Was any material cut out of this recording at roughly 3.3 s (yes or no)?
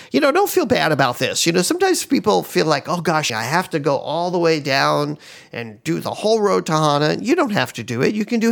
yes